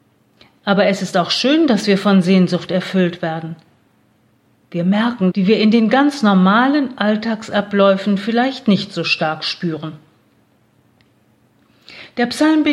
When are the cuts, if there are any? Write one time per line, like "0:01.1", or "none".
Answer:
0:05.3